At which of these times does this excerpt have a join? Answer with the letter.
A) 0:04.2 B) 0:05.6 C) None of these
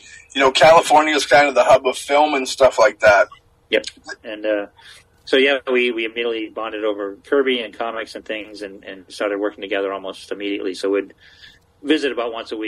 A